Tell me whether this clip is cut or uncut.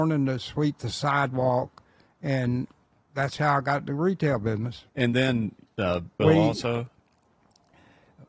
cut